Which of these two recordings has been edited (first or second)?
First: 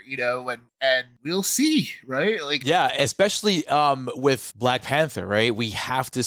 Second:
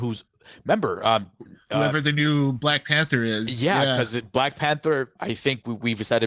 first